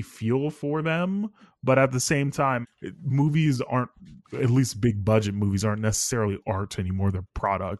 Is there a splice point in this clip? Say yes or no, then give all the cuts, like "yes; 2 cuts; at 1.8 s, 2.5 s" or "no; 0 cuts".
yes; 2 cuts; at 2.6 s, 4.2 s